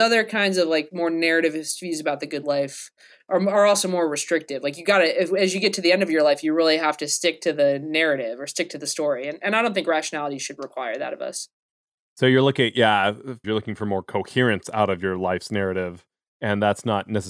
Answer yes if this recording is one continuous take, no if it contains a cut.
no